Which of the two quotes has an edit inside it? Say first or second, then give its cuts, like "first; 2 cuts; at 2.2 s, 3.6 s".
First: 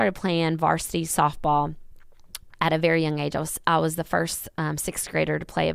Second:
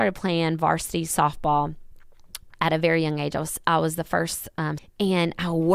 second; 1 cut; at 4.8 s